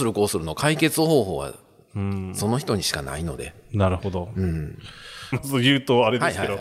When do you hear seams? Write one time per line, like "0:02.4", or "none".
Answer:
0:05.3